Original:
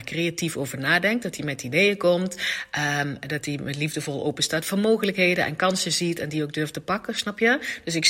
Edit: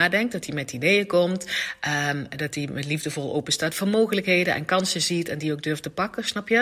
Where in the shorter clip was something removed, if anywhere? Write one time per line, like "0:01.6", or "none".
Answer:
none